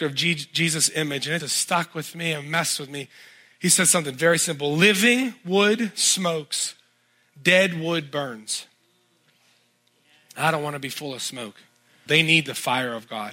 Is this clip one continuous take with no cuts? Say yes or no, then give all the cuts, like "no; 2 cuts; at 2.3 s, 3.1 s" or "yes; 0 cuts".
no; 2 cuts; at 1.4 s, 12.1 s